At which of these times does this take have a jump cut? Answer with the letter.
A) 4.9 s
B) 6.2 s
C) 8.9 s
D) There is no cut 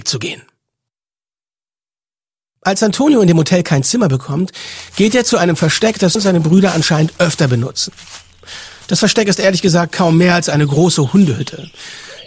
B